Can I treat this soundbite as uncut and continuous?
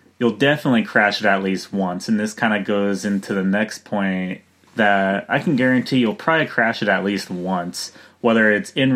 no; 1 cut; at 4.7 s

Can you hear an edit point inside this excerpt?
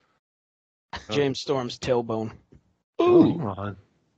yes; 2 cuts; at 1.1 s, 2.8 s

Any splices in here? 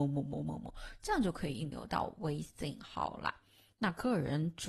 no; 0 cuts

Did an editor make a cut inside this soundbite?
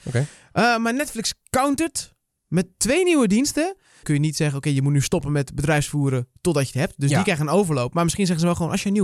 yes; 1 cut; at 4.0 s

